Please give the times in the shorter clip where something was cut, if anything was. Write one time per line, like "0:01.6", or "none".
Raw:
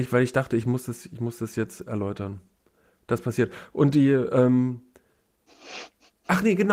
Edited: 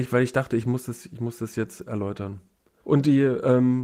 0:02.8